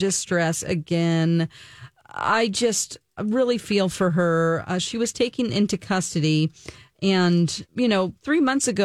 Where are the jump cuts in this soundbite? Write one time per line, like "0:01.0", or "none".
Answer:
0:07.7